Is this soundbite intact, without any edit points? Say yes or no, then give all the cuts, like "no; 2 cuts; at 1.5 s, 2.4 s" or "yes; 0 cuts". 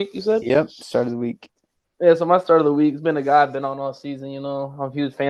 yes; 0 cuts